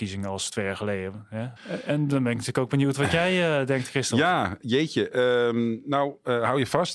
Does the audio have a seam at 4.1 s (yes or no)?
no